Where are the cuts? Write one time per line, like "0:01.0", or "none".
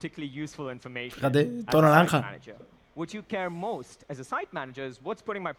0:01.7